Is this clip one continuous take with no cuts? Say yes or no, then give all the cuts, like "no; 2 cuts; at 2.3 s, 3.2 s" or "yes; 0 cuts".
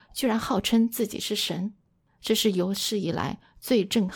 yes; 0 cuts